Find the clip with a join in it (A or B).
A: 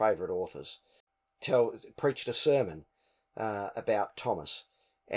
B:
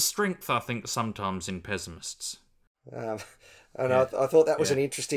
B